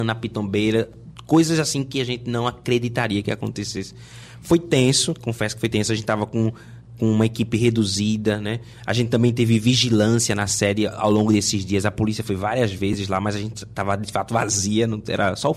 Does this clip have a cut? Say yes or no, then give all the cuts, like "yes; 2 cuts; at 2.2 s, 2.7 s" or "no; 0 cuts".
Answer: no; 0 cuts